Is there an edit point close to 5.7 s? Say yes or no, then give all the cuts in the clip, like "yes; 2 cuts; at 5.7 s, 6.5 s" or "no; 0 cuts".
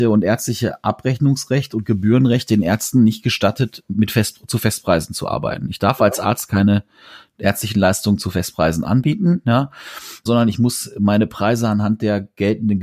no; 1 cut; at 10.3 s